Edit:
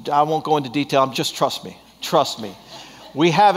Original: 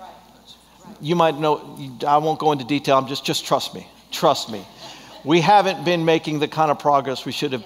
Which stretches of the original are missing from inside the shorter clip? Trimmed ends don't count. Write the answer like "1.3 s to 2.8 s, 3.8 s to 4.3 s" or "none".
3.1 s to 3.2 s